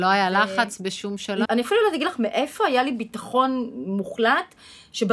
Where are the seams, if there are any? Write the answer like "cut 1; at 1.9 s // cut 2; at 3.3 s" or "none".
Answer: cut 1; at 1.5 s